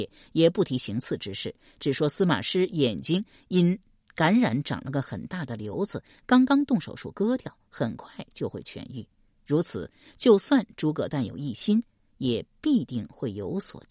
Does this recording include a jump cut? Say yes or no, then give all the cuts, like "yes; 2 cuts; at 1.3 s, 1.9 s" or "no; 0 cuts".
no; 0 cuts